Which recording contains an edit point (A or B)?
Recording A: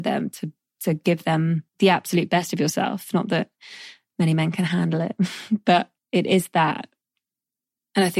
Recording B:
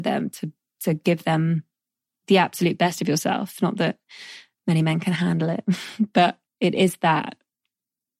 A